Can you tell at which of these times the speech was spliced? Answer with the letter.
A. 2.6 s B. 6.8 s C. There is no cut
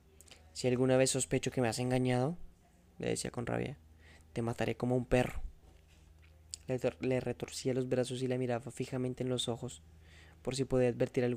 C